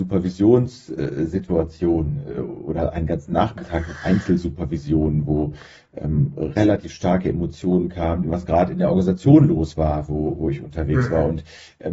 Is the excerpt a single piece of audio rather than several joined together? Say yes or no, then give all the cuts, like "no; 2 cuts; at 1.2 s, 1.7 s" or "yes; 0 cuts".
no; 1 cut; at 8.2 s